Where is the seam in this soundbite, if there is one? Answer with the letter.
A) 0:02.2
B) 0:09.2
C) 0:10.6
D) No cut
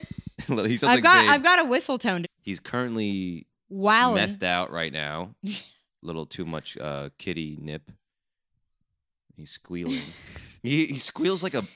A